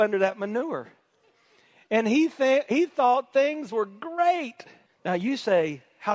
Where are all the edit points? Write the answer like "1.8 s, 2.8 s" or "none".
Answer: 4.9 s